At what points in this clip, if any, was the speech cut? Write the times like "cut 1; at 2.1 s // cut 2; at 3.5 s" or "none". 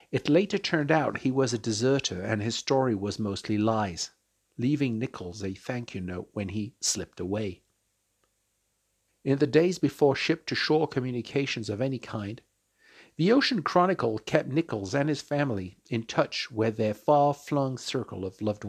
cut 1; at 4.5 s // cut 2; at 9.1 s